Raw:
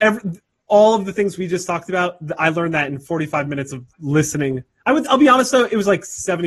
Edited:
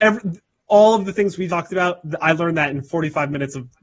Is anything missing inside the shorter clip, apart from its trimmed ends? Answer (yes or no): yes